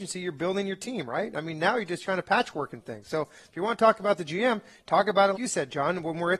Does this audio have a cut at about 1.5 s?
no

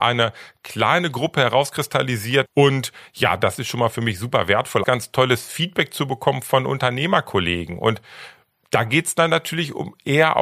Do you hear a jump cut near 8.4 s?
no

